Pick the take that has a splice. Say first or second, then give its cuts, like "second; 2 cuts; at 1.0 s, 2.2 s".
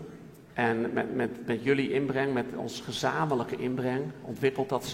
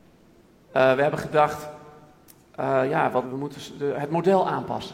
second; 1 cut; at 3.2 s